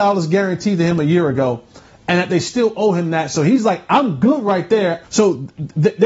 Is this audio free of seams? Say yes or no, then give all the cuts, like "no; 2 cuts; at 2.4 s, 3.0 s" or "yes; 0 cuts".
no; 1 cut; at 5.0 s